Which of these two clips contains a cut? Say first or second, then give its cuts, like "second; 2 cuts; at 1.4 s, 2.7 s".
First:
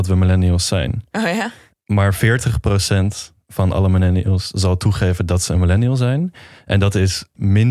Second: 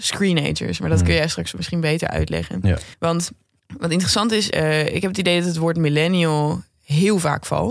second; 2 cuts; at 2.9 s, 4.5 s